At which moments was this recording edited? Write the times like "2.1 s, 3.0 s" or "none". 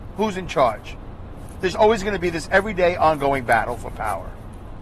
1.7 s